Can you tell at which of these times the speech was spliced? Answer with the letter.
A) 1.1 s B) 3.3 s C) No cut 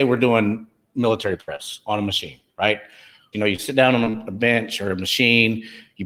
B